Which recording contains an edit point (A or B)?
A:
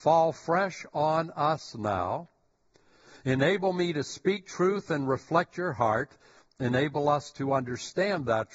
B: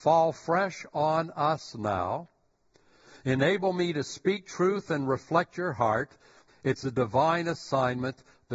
B